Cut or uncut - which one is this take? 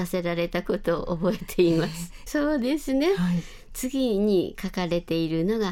cut